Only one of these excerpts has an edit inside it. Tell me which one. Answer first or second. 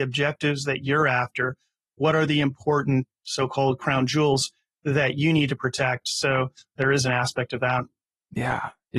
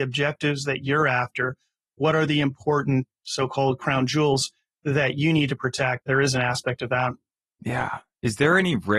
second